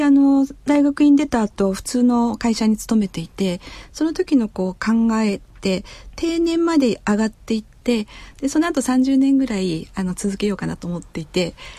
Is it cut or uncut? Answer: cut